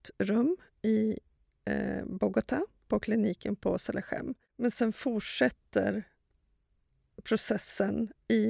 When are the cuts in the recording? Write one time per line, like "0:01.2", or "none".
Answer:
none